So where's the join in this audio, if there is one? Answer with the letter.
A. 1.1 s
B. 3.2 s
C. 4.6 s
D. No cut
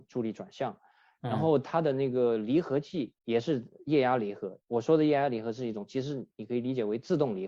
B